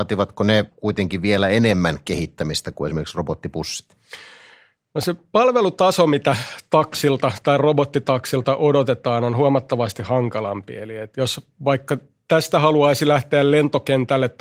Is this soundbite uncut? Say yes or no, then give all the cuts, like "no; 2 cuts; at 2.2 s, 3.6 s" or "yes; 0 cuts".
yes; 0 cuts